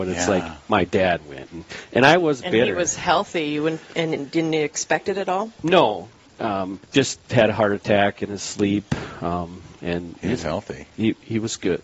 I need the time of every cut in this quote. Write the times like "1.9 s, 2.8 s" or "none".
6.8 s